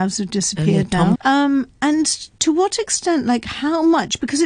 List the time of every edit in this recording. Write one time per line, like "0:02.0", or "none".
0:01.2